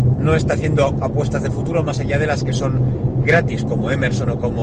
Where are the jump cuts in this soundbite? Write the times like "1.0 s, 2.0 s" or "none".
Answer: 3.2 s